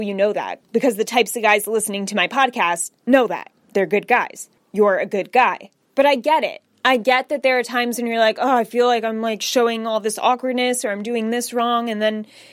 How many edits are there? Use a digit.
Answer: 0